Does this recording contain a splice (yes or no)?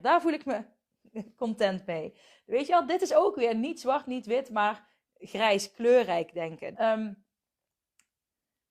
yes